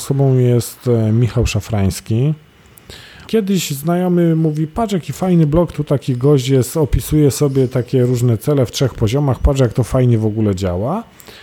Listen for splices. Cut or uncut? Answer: cut